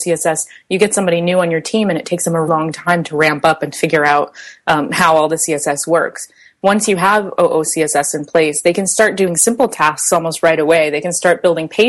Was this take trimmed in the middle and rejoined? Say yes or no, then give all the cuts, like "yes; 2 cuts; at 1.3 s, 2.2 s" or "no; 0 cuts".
yes; 1 cut; at 2.5 s